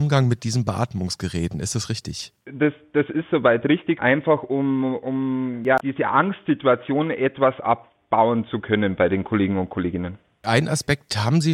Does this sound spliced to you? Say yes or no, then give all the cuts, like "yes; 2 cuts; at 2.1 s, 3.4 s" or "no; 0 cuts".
yes; 2 cuts; at 4.0 s, 5.8 s